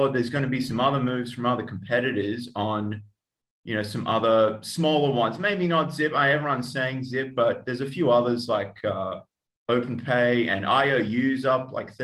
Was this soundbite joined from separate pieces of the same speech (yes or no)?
no